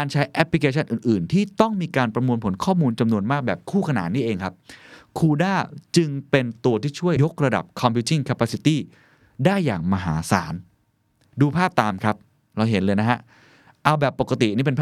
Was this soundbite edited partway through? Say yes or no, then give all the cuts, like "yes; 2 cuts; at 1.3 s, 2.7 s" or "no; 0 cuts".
yes; 1 cut; at 7.2 s